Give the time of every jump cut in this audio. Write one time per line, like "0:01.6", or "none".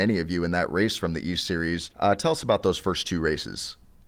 0:01.9